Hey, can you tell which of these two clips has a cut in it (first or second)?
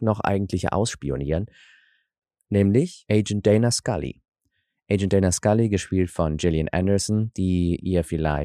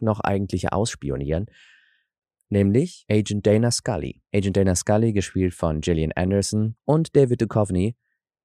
second